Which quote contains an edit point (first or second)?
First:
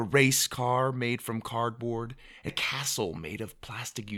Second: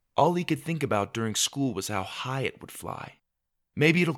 first